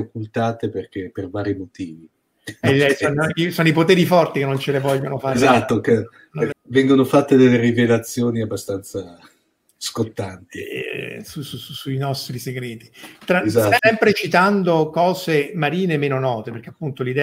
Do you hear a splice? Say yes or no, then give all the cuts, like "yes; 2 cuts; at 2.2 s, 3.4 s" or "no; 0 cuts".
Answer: yes; 2 cuts; at 6.5 s, 13.8 s